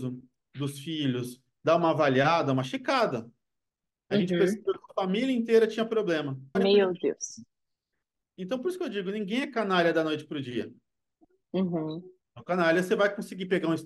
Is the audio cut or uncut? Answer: cut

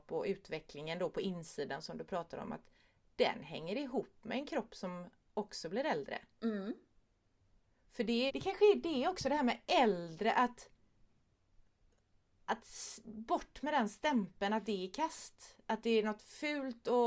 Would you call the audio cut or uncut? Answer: cut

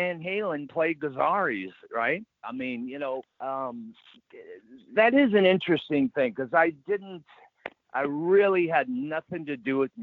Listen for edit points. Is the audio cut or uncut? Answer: cut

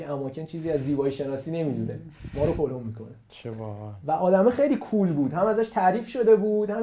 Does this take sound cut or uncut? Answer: uncut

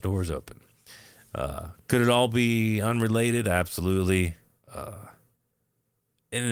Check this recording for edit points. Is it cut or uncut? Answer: uncut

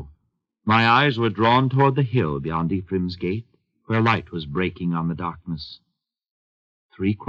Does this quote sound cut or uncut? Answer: uncut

